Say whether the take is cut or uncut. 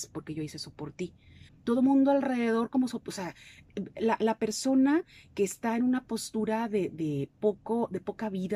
cut